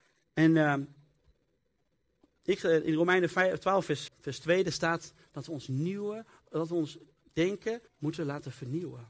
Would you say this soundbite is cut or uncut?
cut